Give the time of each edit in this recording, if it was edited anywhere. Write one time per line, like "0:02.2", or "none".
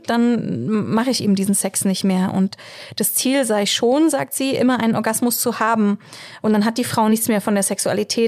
0:06.4